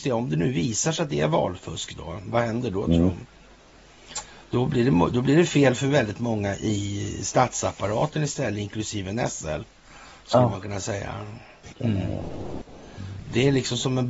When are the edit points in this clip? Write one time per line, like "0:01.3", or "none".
0:11.7

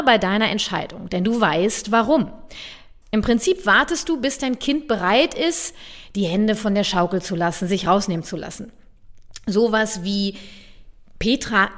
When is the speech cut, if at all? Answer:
0:03.0

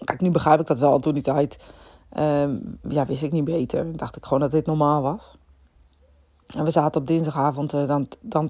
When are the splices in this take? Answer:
none

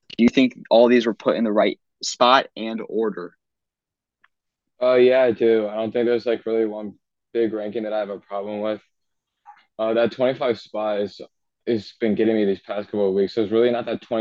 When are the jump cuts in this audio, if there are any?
none

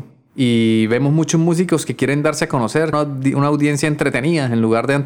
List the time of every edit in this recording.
0:02.9

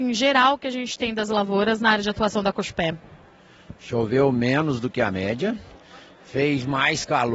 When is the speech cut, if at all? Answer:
none

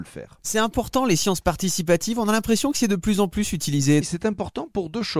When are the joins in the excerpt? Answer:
0:04.0

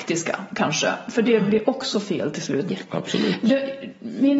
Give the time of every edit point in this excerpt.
0:02.7

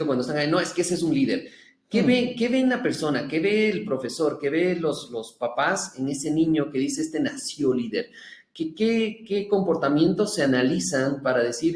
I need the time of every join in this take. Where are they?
none

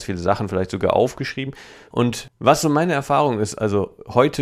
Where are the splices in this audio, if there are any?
0:01.9

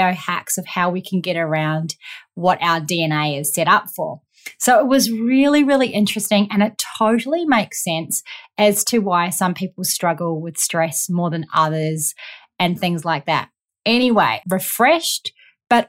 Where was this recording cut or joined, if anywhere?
0:14.4

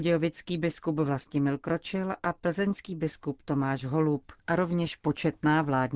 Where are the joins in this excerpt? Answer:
0:04.4

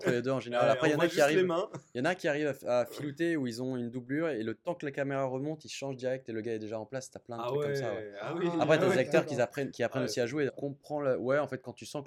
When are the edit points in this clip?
0:10.5

